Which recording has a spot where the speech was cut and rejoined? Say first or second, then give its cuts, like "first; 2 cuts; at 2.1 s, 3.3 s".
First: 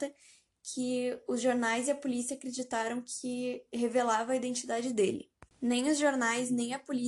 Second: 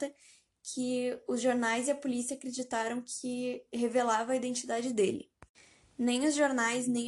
first; 1 cut; at 5.5 s